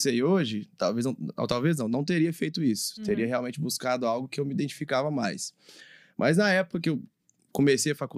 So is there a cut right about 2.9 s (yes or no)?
no